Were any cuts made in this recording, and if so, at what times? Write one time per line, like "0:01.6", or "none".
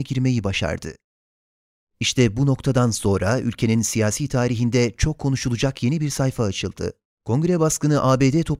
0:07.1